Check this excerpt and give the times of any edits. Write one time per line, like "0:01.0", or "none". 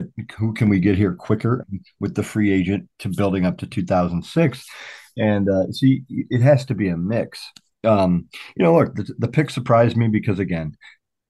0:01.6